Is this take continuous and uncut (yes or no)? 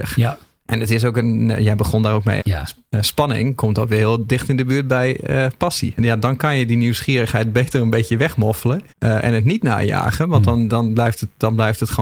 no